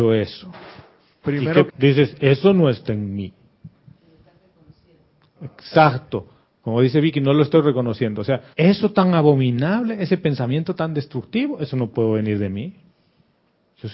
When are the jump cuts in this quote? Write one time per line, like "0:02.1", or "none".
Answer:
0:01.7
0:08.5